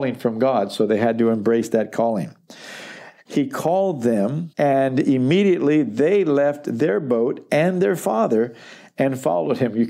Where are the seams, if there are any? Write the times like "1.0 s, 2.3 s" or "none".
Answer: 3.3 s, 4.5 s